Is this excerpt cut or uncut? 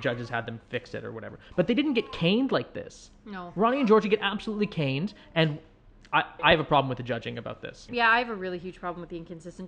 cut